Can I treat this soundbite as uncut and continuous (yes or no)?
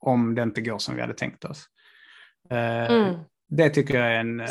yes